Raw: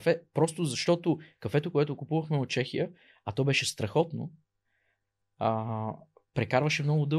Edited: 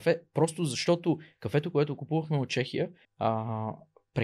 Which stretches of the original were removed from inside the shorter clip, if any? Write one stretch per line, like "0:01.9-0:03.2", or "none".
0:03.0-0:05.2